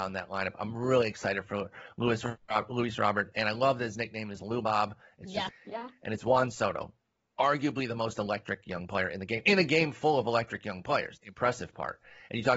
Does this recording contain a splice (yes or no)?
yes